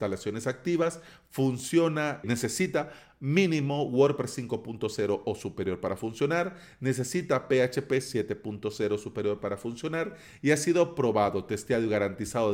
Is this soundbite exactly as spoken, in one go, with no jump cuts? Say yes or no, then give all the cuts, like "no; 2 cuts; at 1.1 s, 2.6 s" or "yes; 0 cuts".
no; 1 cut; at 2.2 s